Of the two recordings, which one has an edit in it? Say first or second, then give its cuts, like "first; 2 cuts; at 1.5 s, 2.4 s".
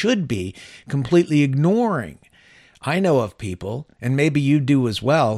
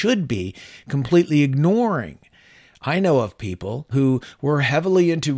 second; 1 cut; at 3.9 s